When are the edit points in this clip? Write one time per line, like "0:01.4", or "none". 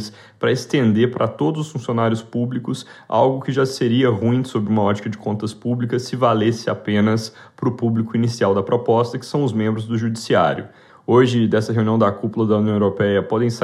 0:10.9